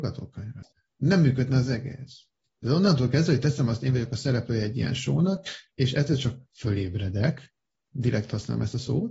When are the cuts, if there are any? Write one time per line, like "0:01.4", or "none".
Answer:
none